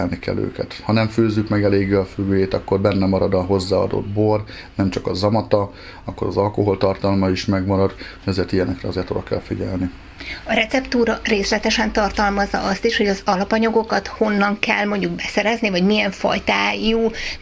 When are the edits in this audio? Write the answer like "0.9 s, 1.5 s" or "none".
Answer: none